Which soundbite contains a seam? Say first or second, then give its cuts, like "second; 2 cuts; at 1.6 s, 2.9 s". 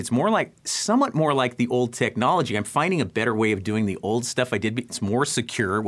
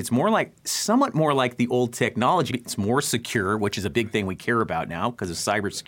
second; 1 cut; at 2.5 s